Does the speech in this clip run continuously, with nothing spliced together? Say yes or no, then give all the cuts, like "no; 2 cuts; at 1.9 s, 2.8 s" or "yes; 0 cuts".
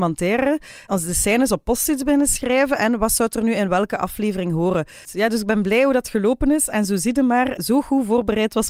no; 2 cuts; at 5.1 s, 7.6 s